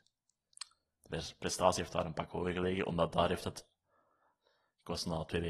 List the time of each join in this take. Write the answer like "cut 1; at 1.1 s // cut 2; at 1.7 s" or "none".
none